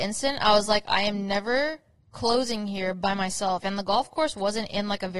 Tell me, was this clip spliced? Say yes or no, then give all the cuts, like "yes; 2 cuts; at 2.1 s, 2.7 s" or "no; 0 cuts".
yes; 1 cut; at 3.6 s